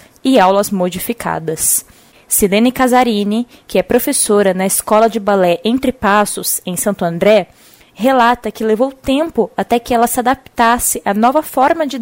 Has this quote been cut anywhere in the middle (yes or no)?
no